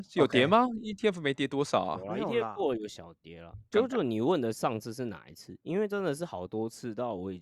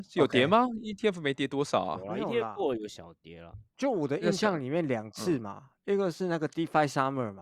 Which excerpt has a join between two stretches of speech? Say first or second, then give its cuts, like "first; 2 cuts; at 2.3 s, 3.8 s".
first; 1 cut; at 3.7 s